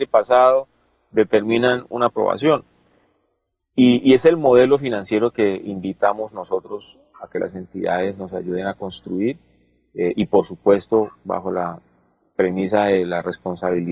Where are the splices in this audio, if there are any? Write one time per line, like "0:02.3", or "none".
none